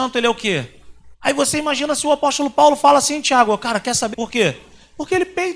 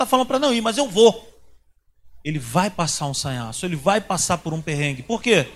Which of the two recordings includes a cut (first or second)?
first